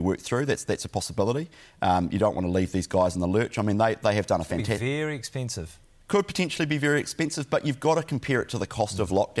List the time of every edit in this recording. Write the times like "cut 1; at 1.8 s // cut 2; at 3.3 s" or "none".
none